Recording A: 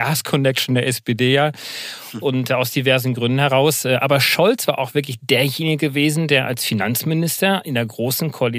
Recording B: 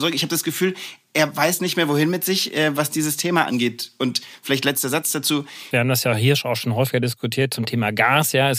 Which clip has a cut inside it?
B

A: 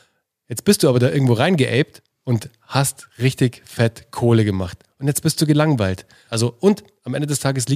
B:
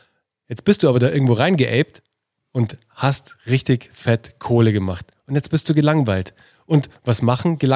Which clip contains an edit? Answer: A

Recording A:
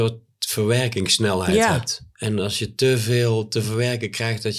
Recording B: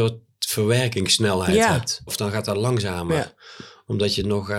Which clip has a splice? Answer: B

